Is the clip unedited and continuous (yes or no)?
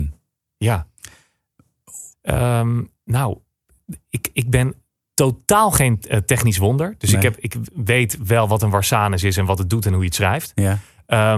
no